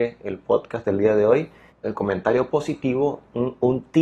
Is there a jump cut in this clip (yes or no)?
yes